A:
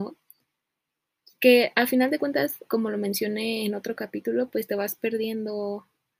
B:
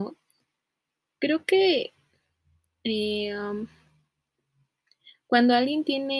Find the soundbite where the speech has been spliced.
B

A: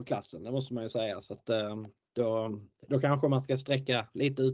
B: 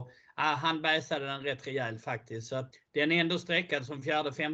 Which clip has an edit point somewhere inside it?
B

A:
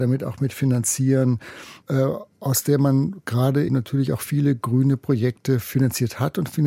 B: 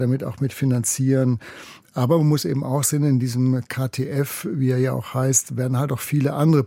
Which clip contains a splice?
A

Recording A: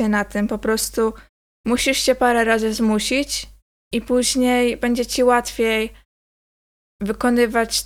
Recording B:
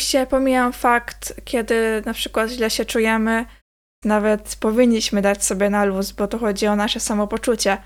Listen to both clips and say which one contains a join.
B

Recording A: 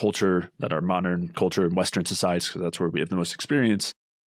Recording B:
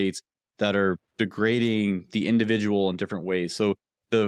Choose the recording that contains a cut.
A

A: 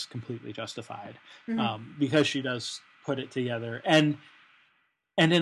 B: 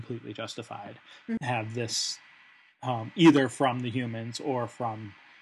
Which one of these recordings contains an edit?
B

